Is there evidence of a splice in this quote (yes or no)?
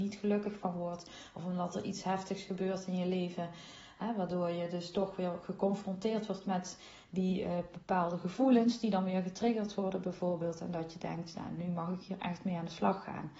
no